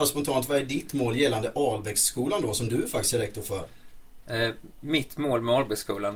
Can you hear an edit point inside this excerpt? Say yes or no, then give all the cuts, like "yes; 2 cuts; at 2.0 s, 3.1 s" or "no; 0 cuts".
no; 0 cuts